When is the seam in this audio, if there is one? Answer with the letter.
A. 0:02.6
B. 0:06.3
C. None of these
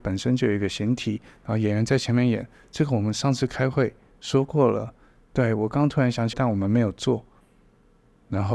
B